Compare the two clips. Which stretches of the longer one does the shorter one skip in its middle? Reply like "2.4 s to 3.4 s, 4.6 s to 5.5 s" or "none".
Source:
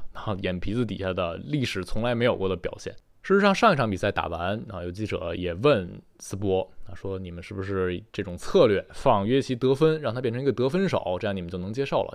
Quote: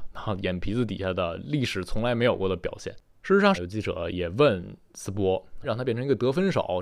3.5 s to 4.8 s, 6.9 s to 10.0 s